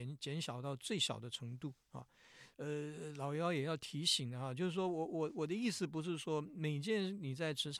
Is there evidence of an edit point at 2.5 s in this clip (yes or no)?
yes